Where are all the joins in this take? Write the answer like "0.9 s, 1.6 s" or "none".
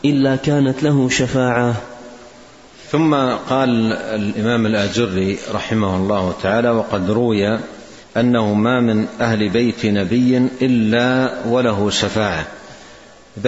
8.0 s